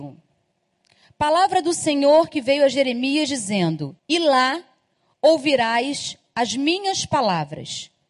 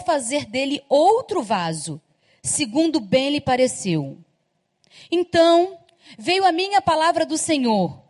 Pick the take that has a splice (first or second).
first